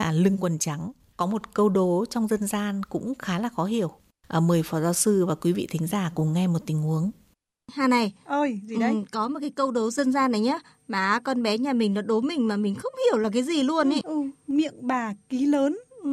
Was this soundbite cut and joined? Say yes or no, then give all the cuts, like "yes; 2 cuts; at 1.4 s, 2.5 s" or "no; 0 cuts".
yes; 1 cut; at 14.0 s